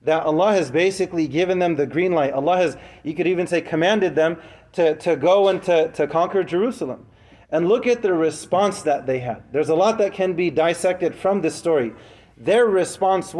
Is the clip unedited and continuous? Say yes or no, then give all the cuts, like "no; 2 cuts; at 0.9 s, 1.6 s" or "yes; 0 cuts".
yes; 0 cuts